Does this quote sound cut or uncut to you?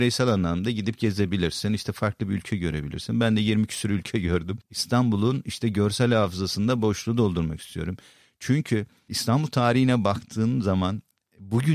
cut